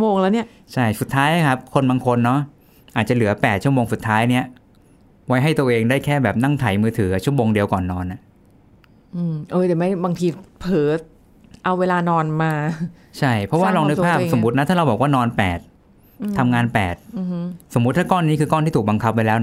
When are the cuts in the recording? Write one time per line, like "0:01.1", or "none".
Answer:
none